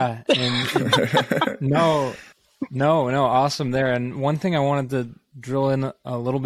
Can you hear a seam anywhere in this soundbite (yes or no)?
no